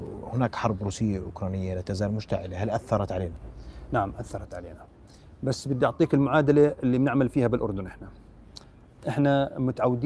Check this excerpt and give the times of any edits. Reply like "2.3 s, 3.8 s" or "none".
none